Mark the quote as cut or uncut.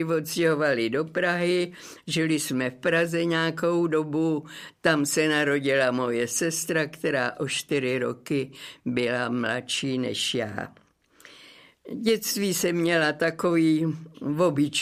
uncut